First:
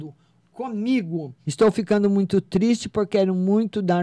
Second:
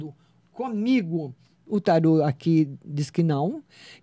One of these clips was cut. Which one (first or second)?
first